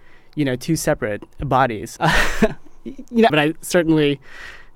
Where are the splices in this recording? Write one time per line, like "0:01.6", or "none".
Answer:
0:02.0
0:03.3